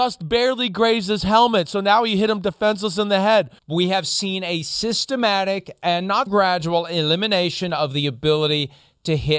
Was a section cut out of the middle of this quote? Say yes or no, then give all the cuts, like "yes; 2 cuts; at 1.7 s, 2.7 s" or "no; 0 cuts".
yes; 2 cuts; at 3.6 s, 6.3 s